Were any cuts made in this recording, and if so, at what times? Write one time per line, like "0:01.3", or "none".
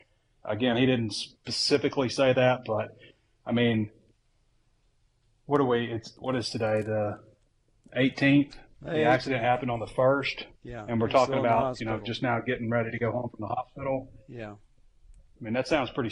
0:10.6